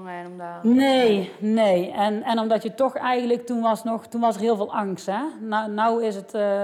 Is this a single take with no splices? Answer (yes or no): yes